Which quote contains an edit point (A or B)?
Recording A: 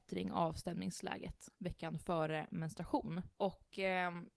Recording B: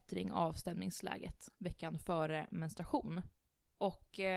A